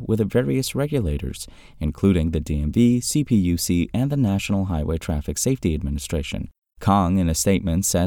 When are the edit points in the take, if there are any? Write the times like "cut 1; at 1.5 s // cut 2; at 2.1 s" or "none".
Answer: none